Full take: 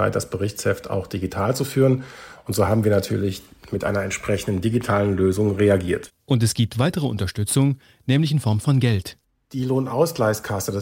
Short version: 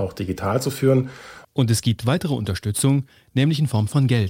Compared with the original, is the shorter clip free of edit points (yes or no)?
no